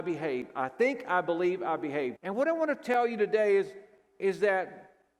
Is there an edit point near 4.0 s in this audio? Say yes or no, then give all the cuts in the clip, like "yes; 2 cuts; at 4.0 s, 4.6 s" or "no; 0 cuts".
no; 1 cut; at 2.1 s